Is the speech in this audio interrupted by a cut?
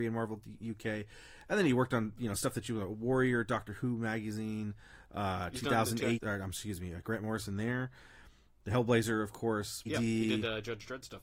yes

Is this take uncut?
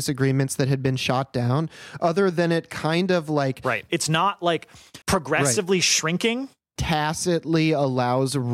no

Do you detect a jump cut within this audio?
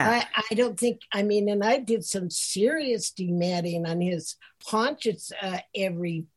no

